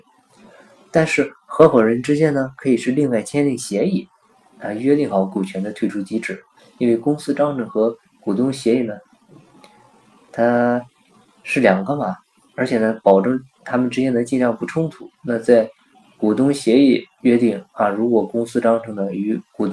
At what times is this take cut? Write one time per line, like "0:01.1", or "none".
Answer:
none